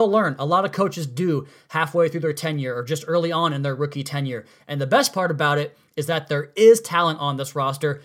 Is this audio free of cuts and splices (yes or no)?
yes